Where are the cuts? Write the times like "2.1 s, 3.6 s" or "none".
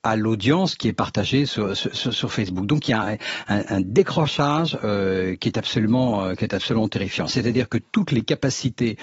none